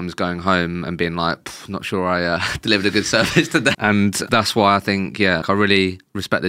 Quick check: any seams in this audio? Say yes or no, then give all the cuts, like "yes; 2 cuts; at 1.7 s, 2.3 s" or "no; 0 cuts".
yes; 2 cuts; at 3.7 s, 5.4 s